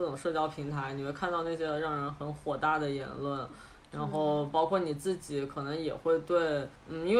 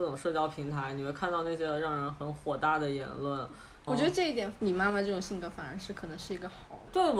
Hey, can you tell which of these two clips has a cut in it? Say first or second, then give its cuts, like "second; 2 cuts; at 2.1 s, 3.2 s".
second; 1 cut; at 3.9 s